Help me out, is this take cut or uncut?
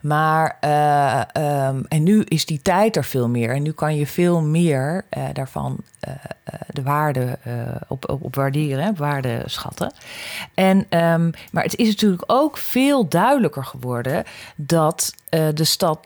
uncut